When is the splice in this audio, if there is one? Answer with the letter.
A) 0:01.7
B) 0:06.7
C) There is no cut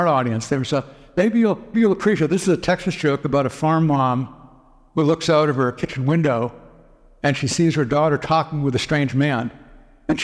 A